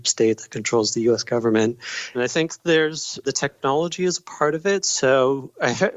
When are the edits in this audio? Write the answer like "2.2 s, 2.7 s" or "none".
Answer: 2.1 s, 3.2 s